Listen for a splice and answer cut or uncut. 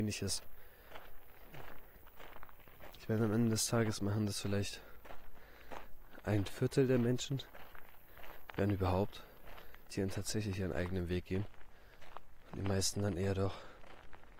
cut